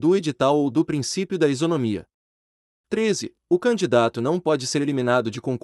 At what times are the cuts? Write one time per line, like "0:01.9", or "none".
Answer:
none